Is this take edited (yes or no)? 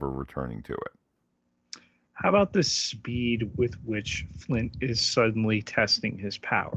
no